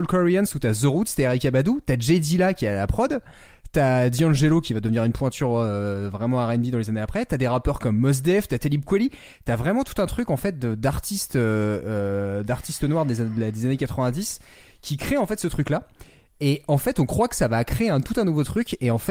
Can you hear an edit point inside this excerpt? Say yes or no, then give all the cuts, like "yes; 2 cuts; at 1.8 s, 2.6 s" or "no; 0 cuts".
yes; 1 cut; at 8.5 s